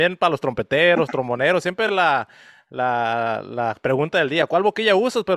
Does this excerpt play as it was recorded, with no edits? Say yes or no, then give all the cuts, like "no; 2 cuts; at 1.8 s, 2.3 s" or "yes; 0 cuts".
yes; 0 cuts